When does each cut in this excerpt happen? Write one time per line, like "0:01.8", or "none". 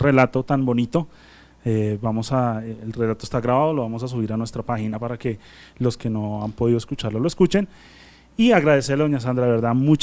none

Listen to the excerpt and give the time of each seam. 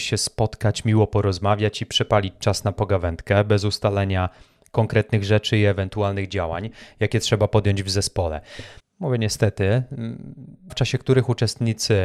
0:08.8
0:10.7

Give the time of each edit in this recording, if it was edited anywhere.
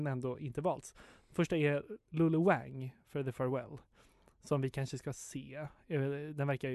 none

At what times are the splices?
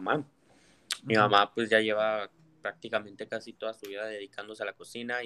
none

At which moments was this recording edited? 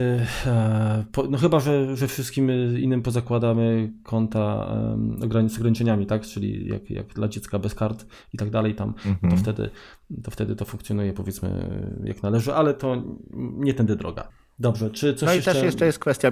none

